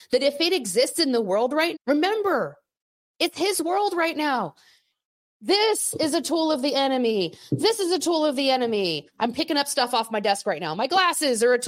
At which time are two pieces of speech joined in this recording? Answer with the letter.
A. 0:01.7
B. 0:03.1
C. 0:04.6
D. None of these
A